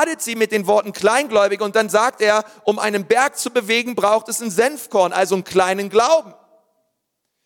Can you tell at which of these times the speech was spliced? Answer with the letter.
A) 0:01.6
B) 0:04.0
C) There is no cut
C